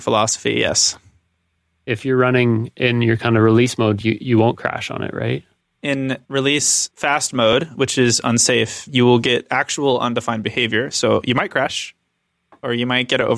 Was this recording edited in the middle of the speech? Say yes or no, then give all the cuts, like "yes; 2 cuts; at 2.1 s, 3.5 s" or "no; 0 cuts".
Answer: no; 0 cuts